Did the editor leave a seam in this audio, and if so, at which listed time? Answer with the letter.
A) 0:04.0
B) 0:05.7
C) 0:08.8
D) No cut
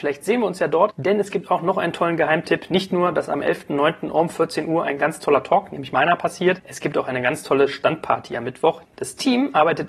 C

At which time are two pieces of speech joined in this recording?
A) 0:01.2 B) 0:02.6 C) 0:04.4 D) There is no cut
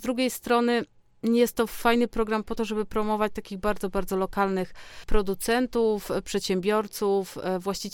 D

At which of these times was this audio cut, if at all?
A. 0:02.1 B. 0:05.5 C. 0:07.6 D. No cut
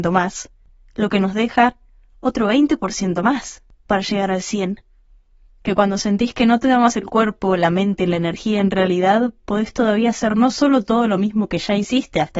B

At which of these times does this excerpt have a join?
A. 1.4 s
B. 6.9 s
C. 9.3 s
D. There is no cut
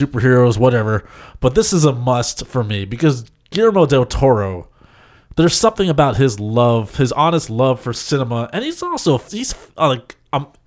C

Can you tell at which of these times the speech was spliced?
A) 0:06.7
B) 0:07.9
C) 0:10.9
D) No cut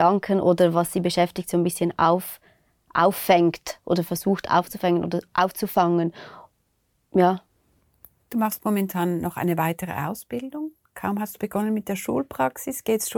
D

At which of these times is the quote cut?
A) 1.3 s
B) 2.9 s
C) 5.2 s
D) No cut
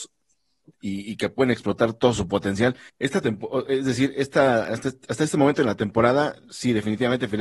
B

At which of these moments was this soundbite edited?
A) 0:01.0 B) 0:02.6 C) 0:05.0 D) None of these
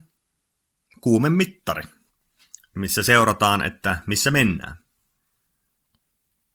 D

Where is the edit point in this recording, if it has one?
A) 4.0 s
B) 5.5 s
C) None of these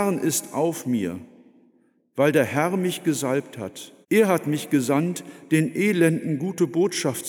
A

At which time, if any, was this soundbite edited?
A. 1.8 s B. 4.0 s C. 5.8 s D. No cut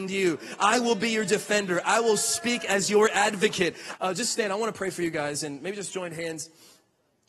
B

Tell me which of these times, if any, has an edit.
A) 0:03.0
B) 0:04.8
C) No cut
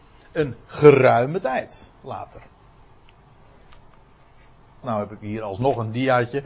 B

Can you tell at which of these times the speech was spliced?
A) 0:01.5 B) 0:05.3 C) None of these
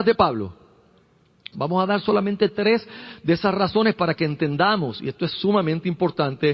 A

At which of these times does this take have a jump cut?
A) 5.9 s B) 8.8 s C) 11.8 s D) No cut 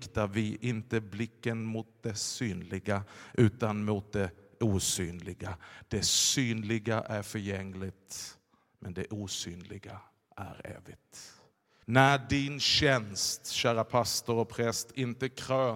C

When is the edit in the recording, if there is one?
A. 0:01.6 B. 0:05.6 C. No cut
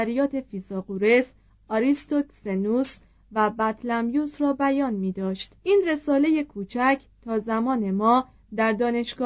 B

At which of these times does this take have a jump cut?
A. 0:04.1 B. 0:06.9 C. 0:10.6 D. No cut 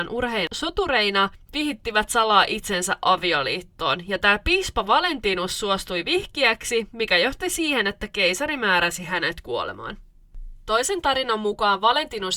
D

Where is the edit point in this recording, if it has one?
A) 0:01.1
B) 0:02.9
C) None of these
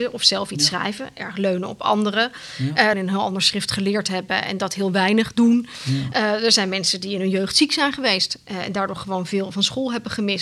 B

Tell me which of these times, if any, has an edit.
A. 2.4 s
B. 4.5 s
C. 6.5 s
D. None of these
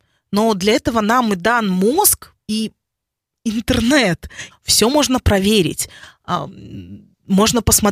B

